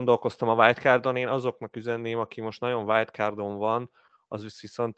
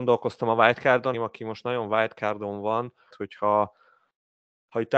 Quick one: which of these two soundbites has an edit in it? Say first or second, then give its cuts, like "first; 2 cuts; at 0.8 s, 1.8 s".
second; 2 cuts; at 1.1 s, 3.1 s